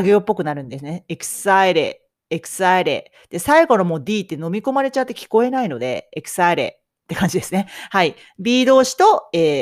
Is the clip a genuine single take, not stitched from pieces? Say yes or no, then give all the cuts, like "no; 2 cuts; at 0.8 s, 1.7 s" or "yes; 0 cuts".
yes; 0 cuts